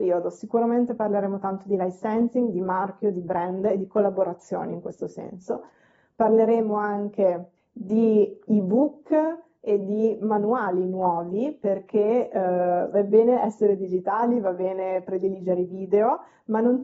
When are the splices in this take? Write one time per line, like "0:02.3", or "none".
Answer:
none